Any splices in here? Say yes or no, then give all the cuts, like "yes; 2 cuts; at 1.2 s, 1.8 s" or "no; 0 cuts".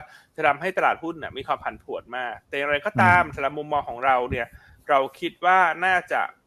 yes; 1 cut; at 2.4 s